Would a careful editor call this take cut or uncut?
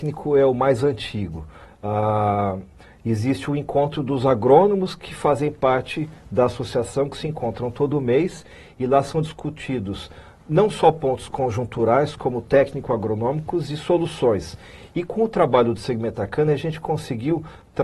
cut